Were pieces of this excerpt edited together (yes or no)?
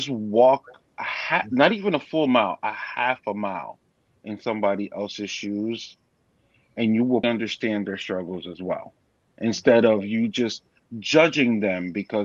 yes